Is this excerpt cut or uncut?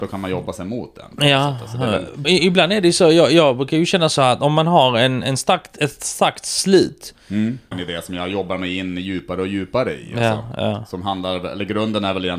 cut